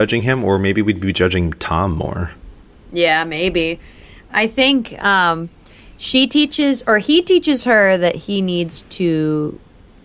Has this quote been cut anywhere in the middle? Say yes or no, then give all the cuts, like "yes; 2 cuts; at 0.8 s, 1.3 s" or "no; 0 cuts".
no; 0 cuts